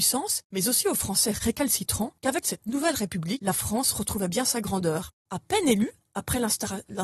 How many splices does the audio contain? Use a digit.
2